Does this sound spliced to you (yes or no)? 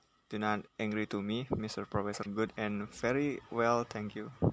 yes